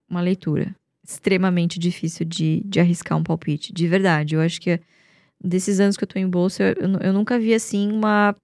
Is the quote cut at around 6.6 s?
no; 0 cuts

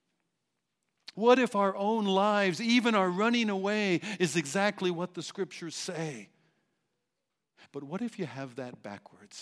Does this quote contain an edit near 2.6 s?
no; 2 cuts; at 1.1 s, 7.7 s

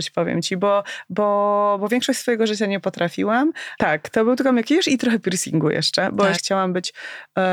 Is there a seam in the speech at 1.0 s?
no; 2 cuts; at 3.8 s, 6.4 s

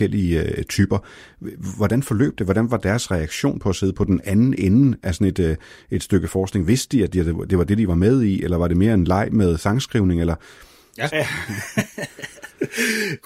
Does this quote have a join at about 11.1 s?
yes; 1 cut; at 11.1 s

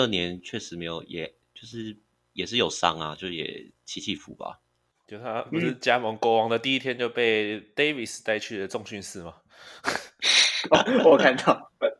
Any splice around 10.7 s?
no; 1 cut; at 4.2 s

